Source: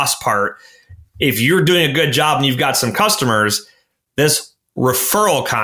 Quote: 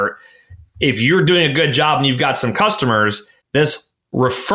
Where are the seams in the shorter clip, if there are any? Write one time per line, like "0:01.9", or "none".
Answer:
0:03.4